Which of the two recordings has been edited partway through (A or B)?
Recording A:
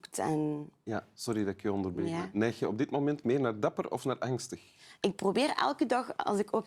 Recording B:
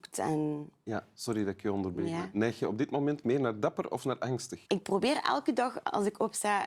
B